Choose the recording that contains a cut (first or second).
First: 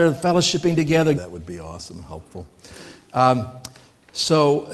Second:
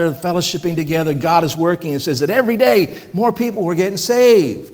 first